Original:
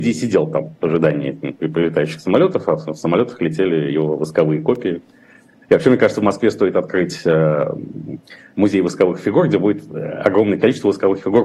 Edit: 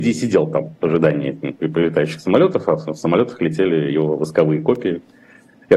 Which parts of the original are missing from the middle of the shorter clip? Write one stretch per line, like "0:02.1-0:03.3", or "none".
none